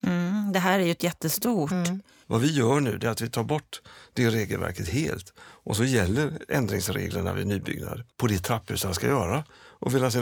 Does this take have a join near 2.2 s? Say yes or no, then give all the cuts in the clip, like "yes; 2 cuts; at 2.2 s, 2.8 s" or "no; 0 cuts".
yes; 2 cuts; at 2.2 s, 8.1 s